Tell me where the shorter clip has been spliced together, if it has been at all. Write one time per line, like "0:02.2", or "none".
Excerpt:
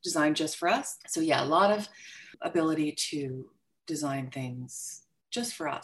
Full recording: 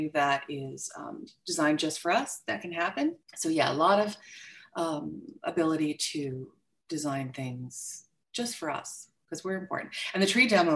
0:01.0
0:02.3